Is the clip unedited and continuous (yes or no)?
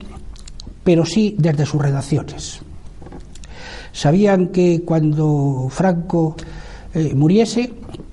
yes